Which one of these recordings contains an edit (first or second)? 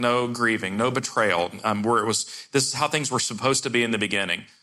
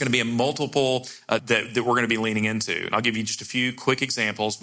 second